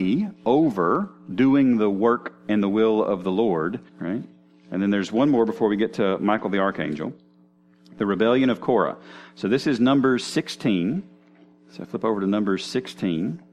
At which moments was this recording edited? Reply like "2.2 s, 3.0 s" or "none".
3.9 s